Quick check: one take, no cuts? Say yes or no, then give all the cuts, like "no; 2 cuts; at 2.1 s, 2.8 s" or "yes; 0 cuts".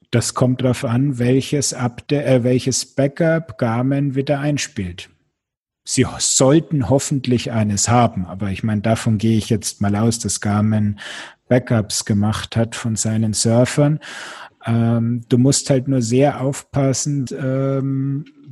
no; 1 cut; at 17.3 s